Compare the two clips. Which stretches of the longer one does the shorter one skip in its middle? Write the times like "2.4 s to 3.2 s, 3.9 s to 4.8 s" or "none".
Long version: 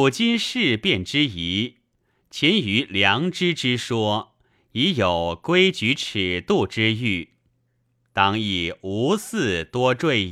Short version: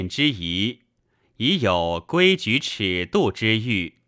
2.2 s to 4.6 s